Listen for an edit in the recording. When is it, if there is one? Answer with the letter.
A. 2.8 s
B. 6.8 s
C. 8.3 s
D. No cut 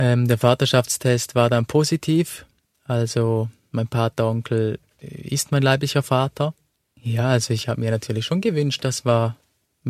B